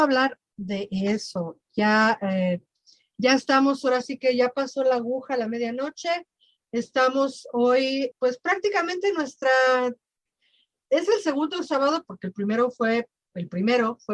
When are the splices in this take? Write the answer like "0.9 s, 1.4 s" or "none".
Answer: 8.1 s, 12.0 s